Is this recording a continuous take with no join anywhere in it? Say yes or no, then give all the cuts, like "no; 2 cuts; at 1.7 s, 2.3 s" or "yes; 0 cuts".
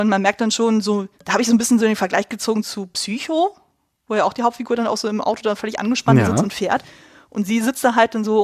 no; 1 cut; at 1.2 s